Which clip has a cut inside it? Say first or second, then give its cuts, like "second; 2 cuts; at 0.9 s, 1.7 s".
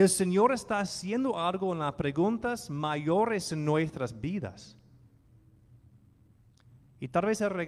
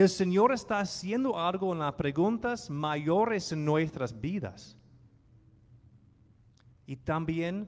second; 1 cut; at 6.7 s